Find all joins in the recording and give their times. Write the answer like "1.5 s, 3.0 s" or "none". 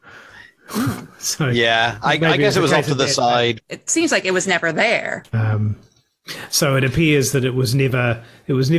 3.6 s, 5.3 s